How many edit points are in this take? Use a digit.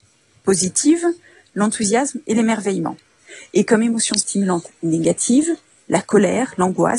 0